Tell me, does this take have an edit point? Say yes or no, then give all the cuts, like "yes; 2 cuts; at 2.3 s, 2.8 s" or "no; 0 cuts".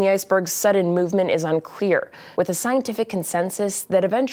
yes; 1 cut; at 2.4 s